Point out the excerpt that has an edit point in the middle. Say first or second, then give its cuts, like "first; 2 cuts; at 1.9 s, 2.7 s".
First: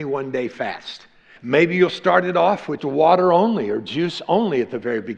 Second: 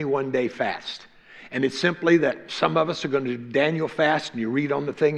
first; 2 cuts; at 1.4 s, 2.8 s